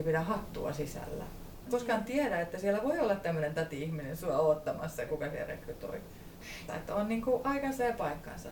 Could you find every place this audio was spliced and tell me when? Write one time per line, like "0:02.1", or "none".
0:01.7
0:05.1
0:06.7